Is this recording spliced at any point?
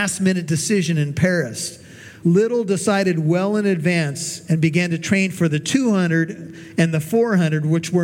yes; 1 cut; at 2.2 s

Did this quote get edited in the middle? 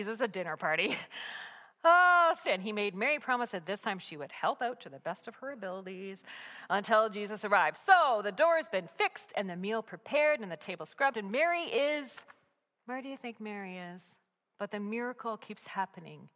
yes; 3 cuts; at 2.4 s, 11.1 s, 14.4 s

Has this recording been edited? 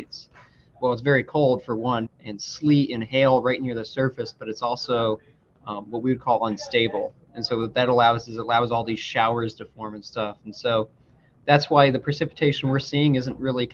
yes; 1 cut; at 2.1 s

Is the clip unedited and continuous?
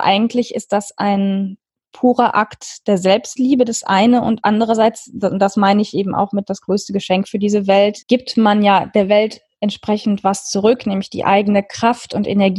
no; 1 cut; at 8.0 s

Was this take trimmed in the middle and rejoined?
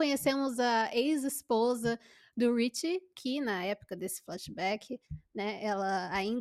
no; 0 cuts

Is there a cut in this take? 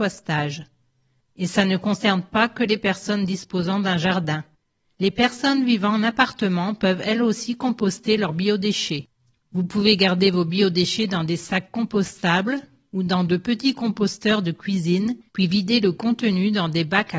no; 0 cuts

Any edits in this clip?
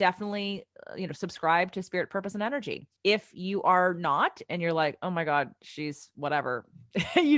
yes; 1 cut; at 3.0 s

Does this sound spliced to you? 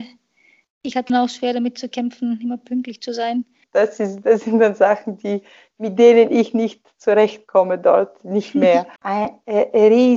yes; 3 cuts; at 1.1 s, 3.6 s, 9.0 s

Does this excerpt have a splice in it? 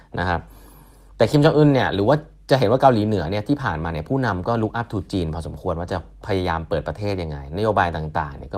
no; 0 cuts

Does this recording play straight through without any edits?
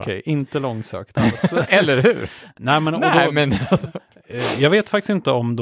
yes; 0 cuts

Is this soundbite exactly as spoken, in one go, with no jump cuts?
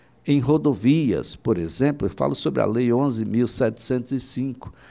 yes; 0 cuts

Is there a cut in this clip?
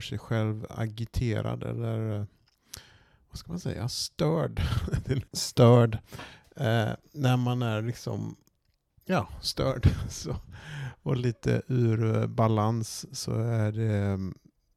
yes; 1 cut; at 5.3 s

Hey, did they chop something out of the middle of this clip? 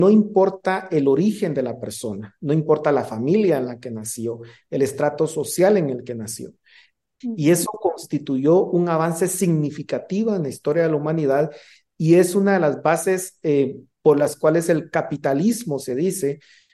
yes; 1 cut; at 7.2 s

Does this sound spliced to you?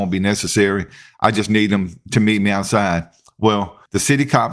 no; 0 cuts

